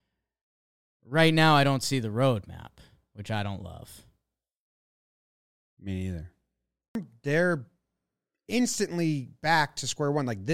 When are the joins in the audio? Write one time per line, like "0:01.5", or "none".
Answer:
none